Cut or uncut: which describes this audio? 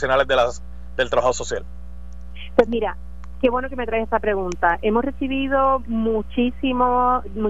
uncut